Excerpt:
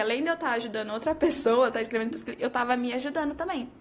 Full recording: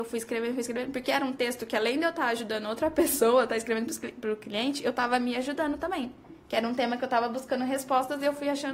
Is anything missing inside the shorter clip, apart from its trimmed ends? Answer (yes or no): yes